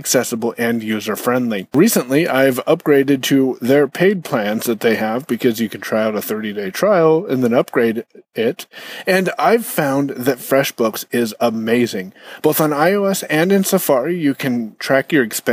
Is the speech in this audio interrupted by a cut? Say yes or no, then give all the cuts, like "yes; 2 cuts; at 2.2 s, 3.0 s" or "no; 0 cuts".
no; 0 cuts